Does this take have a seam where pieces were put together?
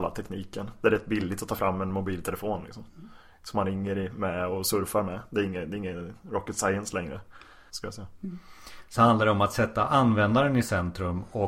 yes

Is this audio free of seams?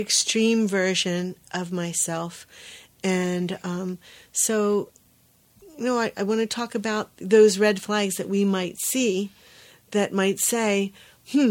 yes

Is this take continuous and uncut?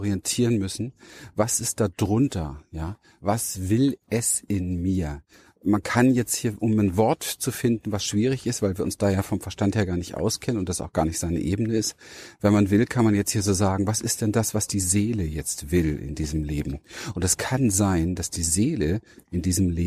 yes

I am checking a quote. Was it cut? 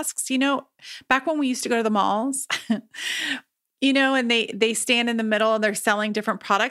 no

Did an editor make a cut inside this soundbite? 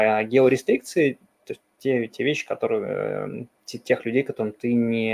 no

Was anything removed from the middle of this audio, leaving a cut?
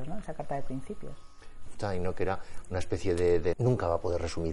yes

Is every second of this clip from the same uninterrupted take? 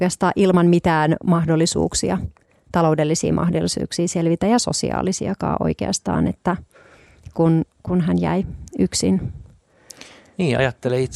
yes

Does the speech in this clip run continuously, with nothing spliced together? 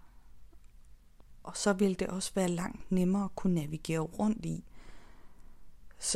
yes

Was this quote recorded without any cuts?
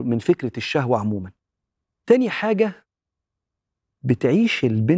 yes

